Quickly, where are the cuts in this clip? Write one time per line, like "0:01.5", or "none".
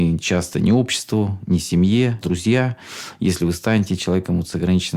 0:02.2